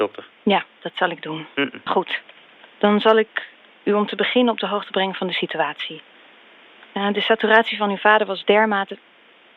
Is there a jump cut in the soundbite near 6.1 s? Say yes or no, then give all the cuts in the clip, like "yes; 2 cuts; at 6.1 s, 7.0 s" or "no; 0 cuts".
no; 1 cut; at 1.9 s